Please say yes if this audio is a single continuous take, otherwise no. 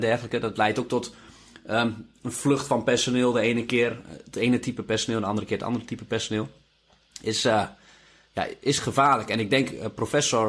yes